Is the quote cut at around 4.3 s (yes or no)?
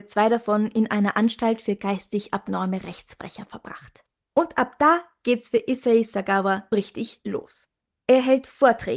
yes